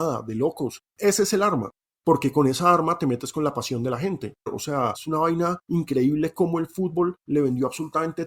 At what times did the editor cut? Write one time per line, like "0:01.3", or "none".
0:00.9
0:04.5